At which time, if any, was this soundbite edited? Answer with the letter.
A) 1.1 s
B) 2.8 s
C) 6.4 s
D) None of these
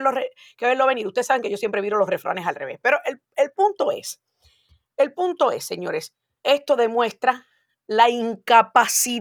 C